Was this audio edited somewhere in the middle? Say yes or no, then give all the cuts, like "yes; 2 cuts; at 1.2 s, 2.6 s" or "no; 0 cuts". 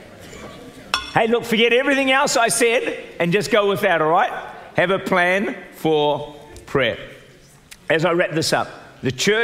no; 0 cuts